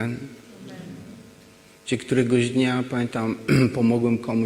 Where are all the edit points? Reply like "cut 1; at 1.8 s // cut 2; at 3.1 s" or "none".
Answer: none